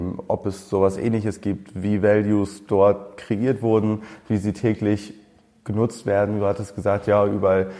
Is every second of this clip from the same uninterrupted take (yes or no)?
yes